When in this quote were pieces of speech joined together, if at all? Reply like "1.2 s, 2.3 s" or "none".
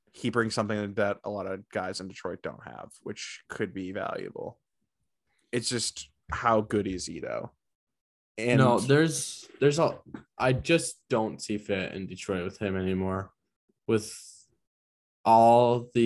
none